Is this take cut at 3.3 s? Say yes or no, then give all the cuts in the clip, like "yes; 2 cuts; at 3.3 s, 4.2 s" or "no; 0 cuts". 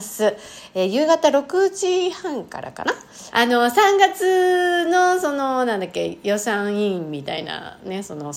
yes; 1 cut; at 3.3 s